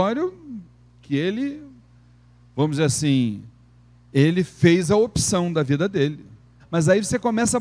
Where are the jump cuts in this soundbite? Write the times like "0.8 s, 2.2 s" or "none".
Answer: 6.6 s